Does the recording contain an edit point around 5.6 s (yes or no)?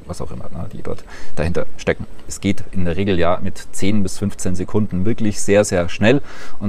no